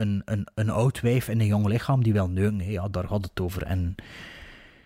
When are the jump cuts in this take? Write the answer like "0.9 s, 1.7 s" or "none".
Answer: none